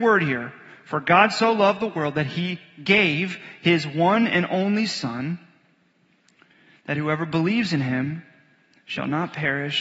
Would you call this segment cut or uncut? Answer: uncut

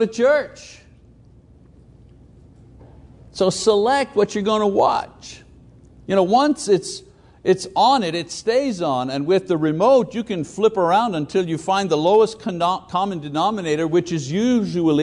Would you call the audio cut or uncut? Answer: uncut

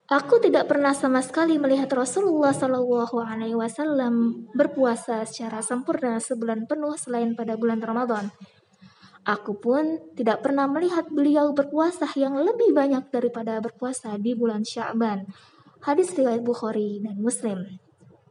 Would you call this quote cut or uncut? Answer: uncut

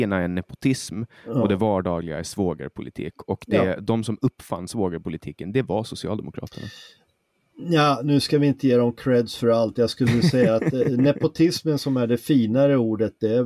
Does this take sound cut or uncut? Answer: uncut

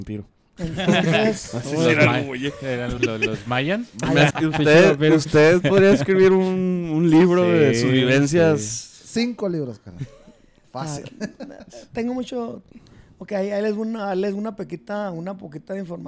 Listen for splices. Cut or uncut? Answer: cut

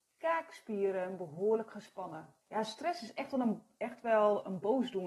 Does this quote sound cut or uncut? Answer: cut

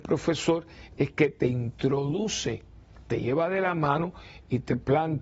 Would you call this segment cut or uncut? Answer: uncut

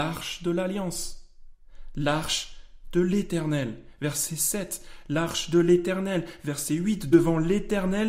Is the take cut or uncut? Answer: uncut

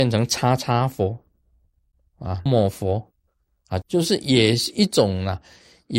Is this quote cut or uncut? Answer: cut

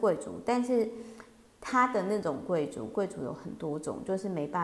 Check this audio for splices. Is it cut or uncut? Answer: uncut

